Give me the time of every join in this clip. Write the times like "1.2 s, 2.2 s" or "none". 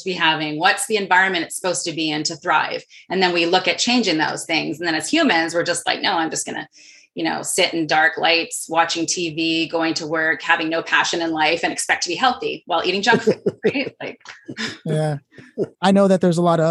15.7 s